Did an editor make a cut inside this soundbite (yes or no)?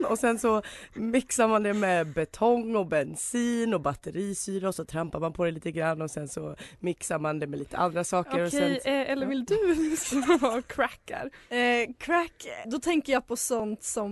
yes